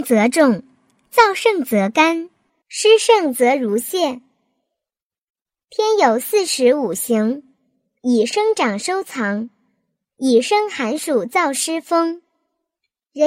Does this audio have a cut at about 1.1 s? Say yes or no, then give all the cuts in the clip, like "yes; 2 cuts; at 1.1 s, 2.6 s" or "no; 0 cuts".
no; 1 cut; at 2.6 s